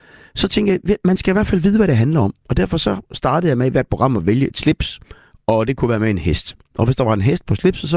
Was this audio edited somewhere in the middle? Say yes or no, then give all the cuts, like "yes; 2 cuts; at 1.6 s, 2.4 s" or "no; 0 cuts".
no; 0 cuts